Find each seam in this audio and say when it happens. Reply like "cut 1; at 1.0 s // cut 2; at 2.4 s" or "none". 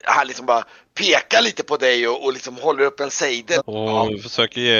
cut 1; at 3.6 s